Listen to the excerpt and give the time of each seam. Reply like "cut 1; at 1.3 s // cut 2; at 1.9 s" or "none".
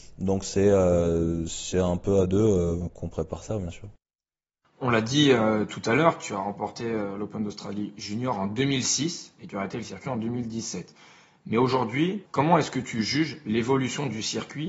cut 1; at 2.9 s // cut 2; at 12.3 s